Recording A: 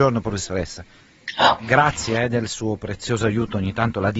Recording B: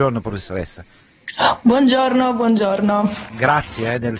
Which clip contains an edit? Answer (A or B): A